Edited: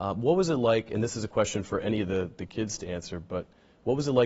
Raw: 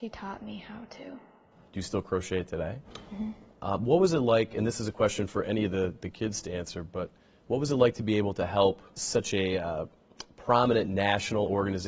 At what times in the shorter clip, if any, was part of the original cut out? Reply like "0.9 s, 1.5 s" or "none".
none